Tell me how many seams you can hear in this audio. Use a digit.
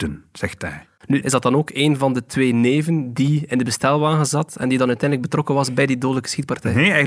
1